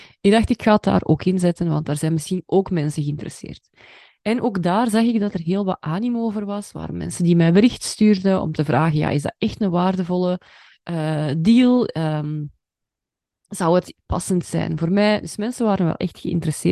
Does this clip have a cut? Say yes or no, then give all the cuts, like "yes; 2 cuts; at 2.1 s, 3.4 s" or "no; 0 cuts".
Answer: no; 0 cuts